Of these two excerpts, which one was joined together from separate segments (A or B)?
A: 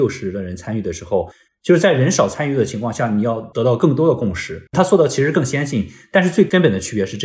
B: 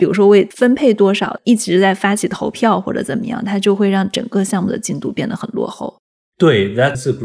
A